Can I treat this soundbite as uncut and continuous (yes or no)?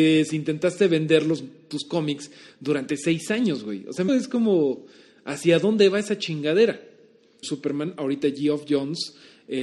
no